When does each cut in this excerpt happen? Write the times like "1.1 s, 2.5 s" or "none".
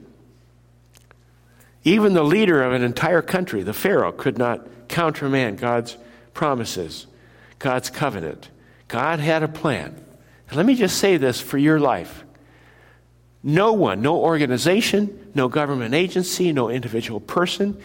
none

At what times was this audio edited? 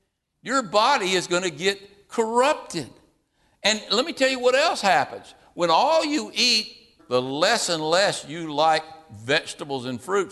7.0 s

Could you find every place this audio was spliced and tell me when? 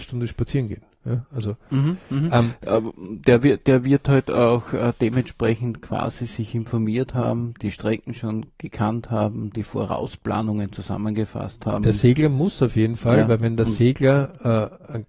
none

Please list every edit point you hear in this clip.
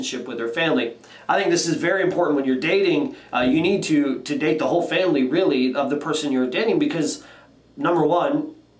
none

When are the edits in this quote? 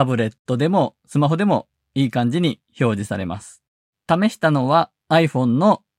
3.9 s

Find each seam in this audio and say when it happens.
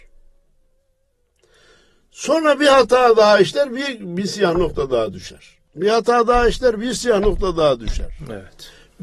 none

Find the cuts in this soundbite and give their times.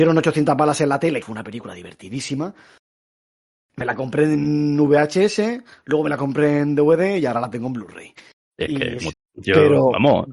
1.2 s, 9.1 s

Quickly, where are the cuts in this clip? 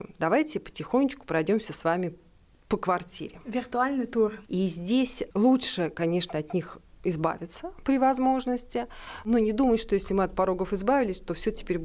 4.4 s

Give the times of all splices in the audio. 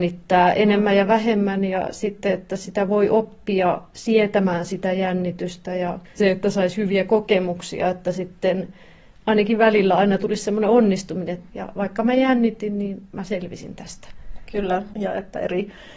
6.1 s, 14.9 s

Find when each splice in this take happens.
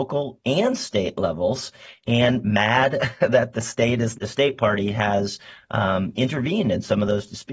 4.1 s

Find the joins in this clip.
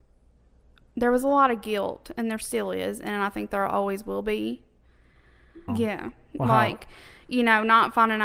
5.7 s

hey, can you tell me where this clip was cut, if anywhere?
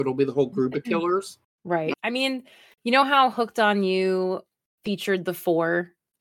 1.9 s

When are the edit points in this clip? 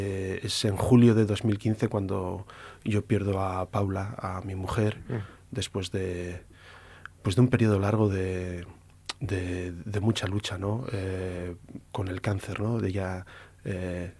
none

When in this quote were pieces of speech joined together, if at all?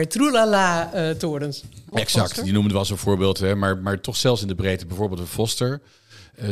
1.9 s

